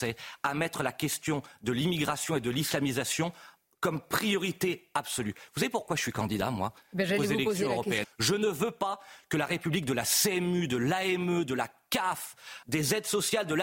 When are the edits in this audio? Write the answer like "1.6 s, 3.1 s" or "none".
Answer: 8.0 s, 12.6 s